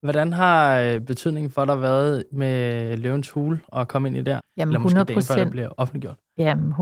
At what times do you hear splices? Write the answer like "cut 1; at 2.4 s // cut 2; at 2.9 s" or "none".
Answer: cut 1; at 4.4 s